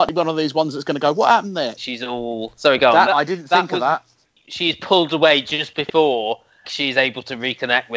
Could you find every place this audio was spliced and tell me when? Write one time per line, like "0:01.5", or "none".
0:01.8
0:03.0
0:06.6